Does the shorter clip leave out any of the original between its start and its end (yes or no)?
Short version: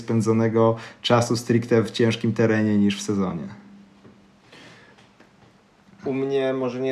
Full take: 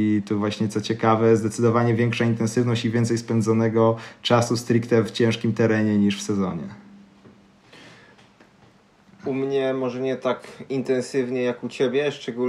no